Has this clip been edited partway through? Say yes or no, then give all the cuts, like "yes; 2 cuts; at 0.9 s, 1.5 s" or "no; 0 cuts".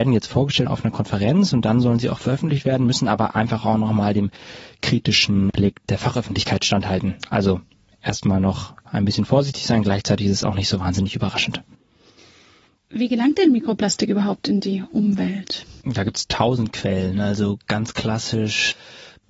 no; 0 cuts